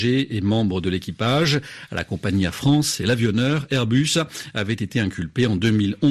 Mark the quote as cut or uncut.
uncut